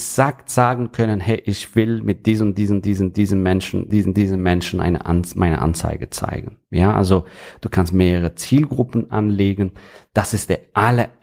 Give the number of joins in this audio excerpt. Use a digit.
1